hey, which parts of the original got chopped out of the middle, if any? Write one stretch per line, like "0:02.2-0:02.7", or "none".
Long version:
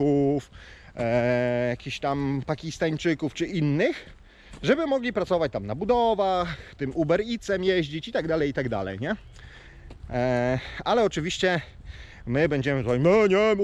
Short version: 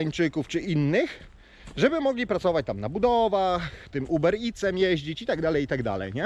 none